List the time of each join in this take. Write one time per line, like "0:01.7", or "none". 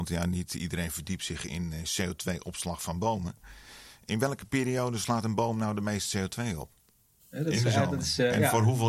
0:07.2